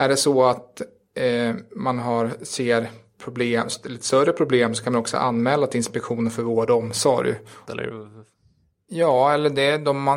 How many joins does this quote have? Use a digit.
1